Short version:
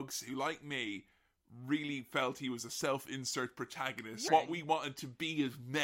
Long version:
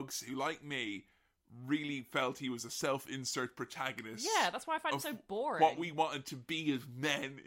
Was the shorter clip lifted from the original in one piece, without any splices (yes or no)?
no